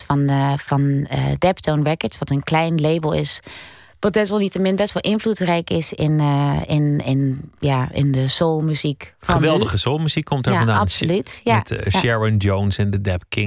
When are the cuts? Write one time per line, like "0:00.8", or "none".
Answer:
none